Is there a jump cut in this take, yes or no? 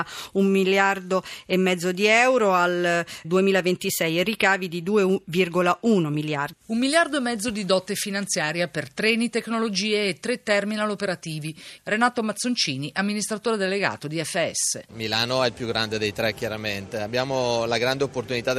yes